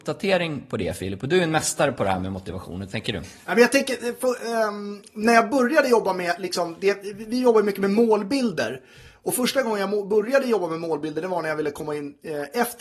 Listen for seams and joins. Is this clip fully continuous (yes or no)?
yes